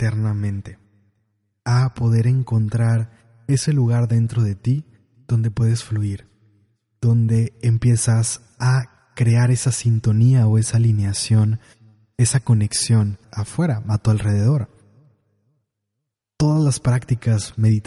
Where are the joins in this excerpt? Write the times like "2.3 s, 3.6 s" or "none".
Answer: 13.2 s